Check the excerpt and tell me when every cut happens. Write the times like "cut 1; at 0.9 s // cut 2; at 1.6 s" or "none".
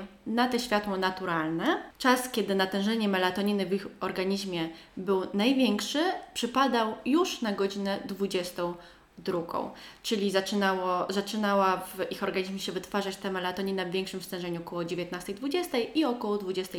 none